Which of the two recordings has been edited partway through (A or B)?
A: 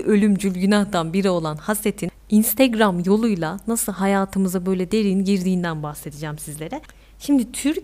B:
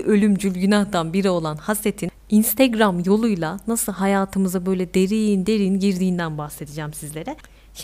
A